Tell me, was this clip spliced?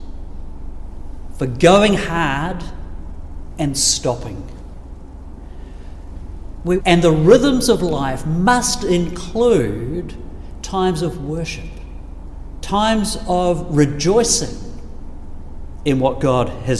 yes; 3 cuts; at 3.7 s, 6.8 s, 12.6 s

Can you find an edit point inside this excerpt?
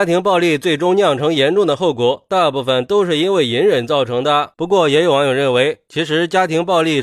yes; 1 cut; at 4.5 s

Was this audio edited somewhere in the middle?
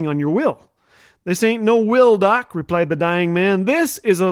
no; 0 cuts

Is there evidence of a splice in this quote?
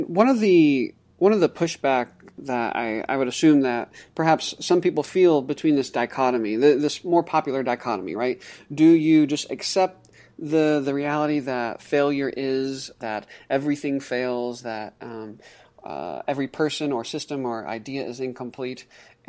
no; 0 cuts

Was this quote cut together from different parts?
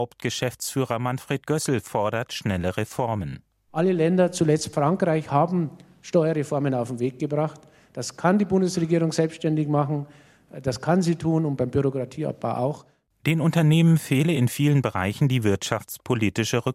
no; 0 cuts

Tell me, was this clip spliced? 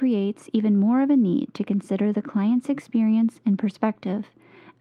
no; 0 cuts

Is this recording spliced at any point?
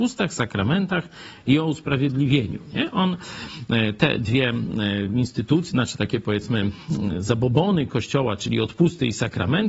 no; 0 cuts

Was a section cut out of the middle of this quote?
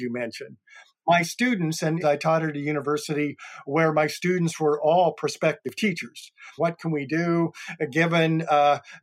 yes; 2 cuts; at 2.0 s, 6.6 s

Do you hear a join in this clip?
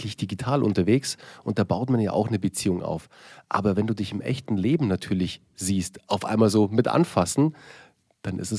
no; 0 cuts

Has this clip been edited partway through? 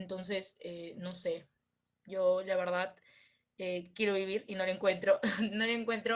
no; 0 cuts

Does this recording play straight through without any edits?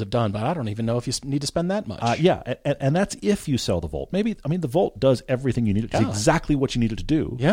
no; 1 cut; at 5.9 s

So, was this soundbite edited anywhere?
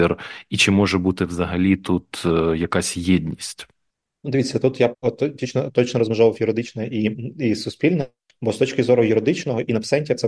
yes; 1 cut; at 4.9 s

